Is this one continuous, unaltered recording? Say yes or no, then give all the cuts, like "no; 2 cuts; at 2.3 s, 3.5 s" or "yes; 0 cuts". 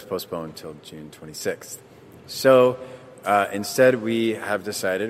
yes; 0 cuts